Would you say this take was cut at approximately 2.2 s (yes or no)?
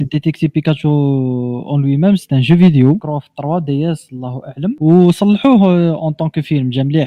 yes